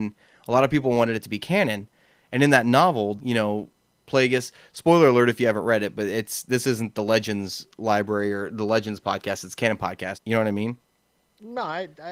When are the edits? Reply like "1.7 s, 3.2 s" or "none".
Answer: 3.2 s, 10.1 s